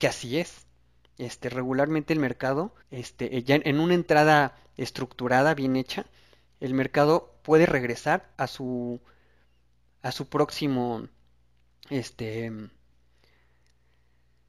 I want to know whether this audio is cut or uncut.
cut